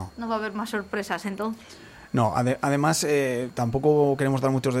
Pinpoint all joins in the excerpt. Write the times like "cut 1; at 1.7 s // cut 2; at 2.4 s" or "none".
none